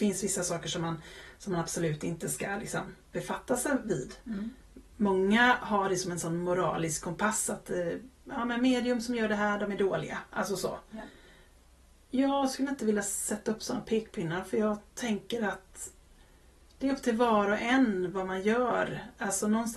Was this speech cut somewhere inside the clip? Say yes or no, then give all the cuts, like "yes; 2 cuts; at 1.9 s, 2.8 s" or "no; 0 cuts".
no; 0 cuts